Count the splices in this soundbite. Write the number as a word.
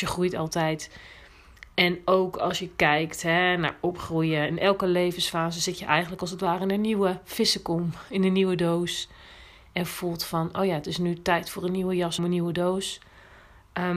two